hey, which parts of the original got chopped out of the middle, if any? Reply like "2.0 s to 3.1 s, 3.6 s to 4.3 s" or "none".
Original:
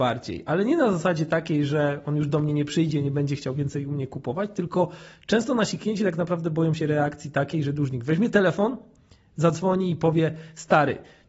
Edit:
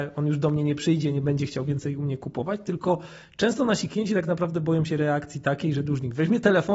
none